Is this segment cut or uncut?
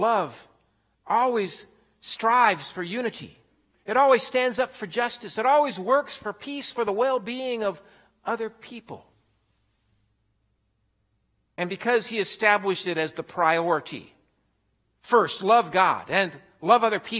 uncut